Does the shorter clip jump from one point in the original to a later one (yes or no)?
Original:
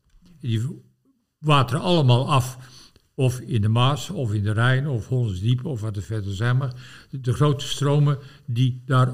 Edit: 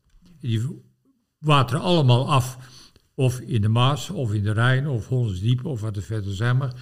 no